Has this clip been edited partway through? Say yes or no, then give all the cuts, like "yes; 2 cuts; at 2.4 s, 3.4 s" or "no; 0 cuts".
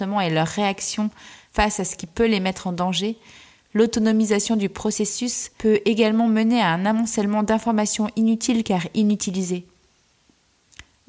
no; 0 cuts